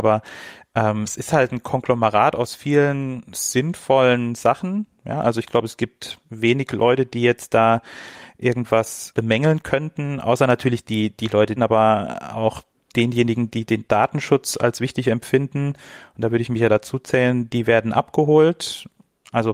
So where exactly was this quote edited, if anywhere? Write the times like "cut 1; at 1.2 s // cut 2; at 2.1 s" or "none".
cut 1; at 11.6 s

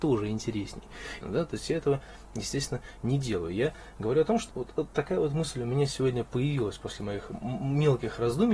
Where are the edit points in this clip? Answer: cut 1; at 1.2 s // cut 2; at 4.5 s

